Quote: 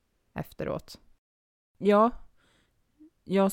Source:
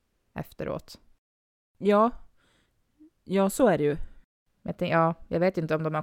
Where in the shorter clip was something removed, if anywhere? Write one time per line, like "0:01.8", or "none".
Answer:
none